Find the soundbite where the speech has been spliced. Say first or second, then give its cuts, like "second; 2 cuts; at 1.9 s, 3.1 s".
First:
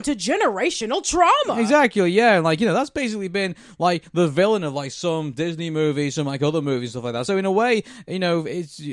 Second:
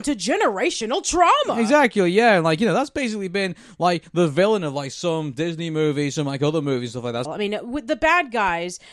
second; 1 cut; at 7.3 s